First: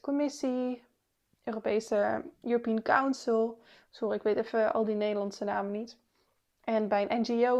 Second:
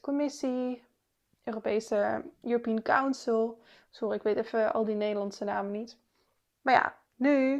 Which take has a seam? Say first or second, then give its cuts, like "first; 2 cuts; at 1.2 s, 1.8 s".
second; 1 cut; at 6.5 s